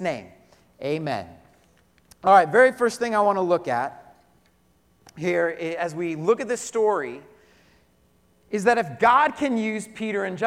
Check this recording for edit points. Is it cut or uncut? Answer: uncut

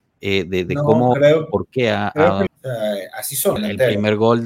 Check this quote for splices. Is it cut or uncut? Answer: cut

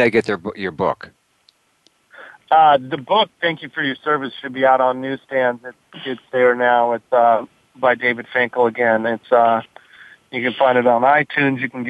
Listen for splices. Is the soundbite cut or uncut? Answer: uncut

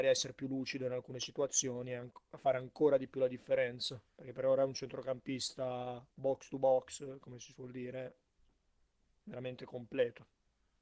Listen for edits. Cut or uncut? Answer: uncut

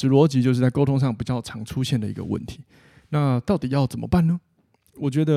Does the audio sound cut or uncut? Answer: uncut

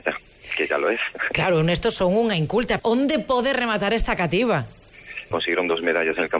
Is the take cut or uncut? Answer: cut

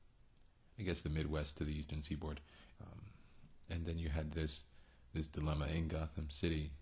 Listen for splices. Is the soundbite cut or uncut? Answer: cut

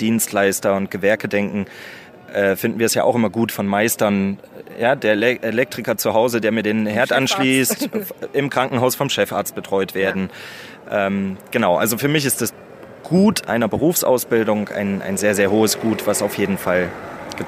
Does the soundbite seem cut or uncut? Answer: uncut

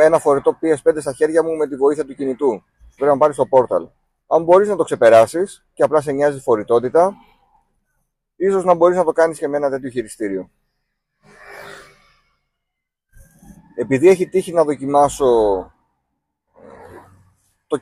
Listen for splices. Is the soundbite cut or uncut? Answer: cut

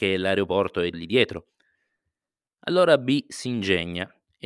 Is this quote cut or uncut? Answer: cut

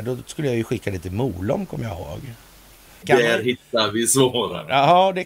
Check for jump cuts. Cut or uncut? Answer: cut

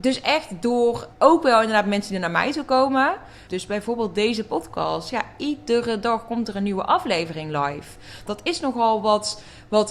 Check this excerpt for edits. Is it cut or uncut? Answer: cut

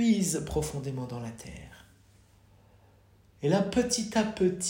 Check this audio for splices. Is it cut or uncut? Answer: uncut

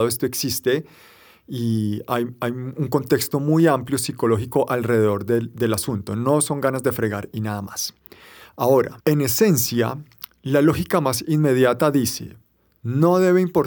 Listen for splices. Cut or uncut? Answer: cut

